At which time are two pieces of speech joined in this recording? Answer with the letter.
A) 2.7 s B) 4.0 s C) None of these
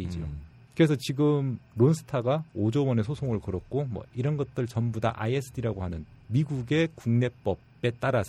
B